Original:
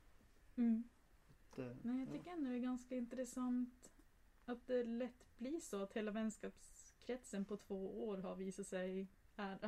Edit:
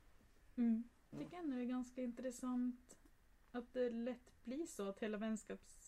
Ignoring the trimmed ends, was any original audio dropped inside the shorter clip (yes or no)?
yes